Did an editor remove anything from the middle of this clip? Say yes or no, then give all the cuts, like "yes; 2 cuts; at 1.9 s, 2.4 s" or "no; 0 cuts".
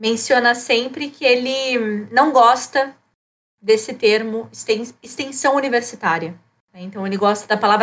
no; 0 cuts